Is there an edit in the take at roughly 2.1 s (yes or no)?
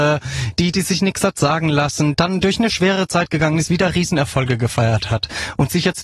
yes